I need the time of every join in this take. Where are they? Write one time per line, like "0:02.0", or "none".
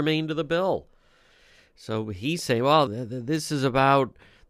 0:02.9

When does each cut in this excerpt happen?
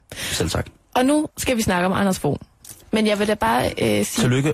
0:02.8

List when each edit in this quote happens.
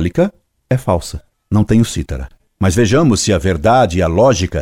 0:01.3

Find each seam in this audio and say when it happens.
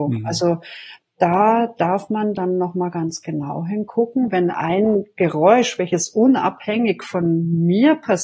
none

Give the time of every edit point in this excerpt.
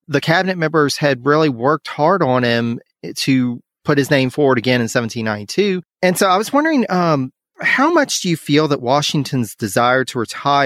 0:05.8

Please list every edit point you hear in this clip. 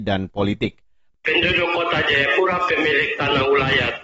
0:01.1

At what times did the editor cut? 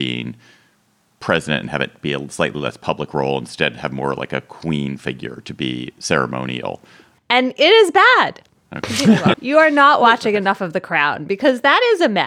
0:07.2
0:09.3

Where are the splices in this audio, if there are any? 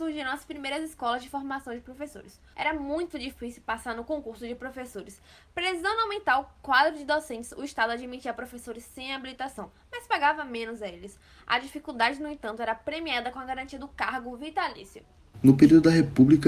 0:02.5
0:15.3

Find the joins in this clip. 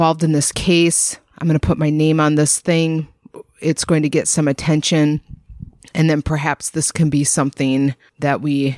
none

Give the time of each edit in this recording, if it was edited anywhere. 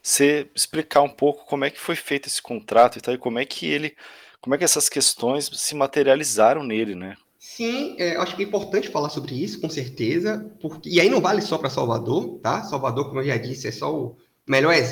0:07.2

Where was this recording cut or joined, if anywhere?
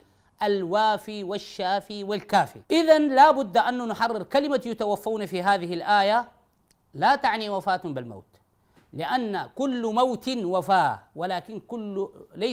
0:02.6

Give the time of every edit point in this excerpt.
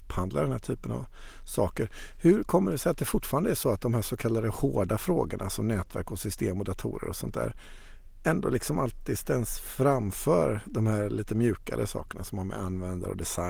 none

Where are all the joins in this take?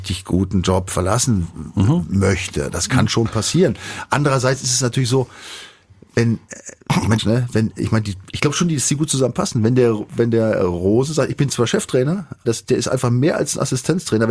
0:07.2
0:12.4

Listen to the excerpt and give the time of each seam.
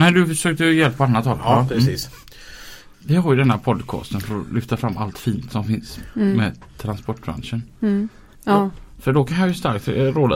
0:02.9
0:08.3

